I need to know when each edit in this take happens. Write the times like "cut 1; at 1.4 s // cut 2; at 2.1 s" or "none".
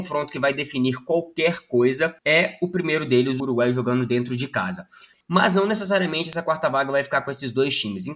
cut 1; at 2.2 s // cut 2; at 3.4 s